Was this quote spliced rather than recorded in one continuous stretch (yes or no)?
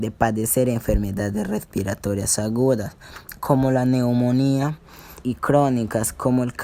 yes